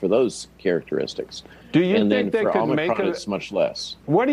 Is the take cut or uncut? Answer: uncut